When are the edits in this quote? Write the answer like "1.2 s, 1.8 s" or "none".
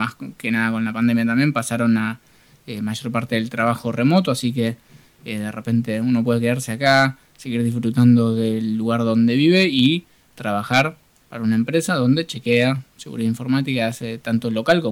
none